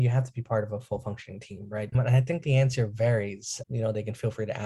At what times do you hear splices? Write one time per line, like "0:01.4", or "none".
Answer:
0:01.9
0:03.7

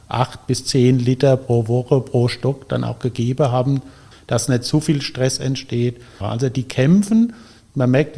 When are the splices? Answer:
0:04.1
0:06.2

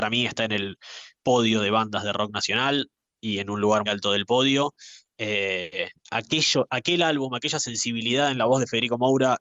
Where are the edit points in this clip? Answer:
0:03.9
0:06.0

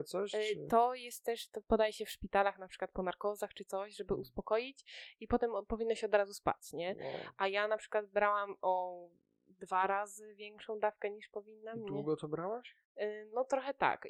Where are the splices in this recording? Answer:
none

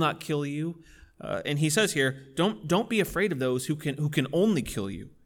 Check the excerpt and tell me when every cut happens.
none

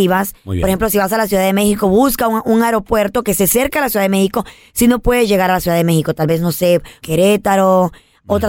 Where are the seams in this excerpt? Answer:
0:07.0

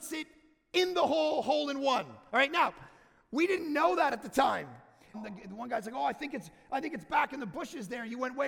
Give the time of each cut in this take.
0:05.1

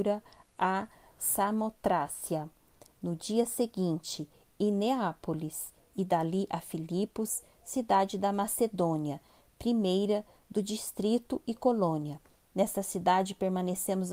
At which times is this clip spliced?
none

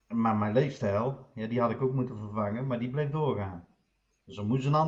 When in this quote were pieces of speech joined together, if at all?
none

